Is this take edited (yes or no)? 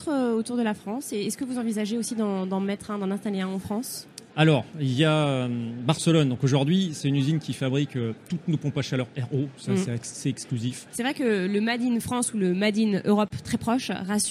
yes